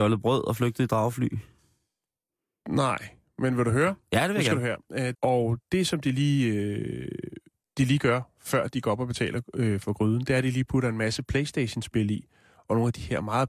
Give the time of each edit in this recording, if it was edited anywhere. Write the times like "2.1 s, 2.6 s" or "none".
5.1 s